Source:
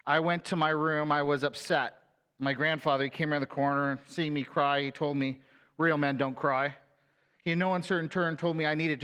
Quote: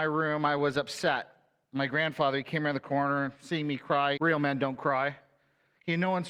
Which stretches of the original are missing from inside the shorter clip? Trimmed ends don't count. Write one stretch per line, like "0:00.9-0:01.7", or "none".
0:04.8-0:05.7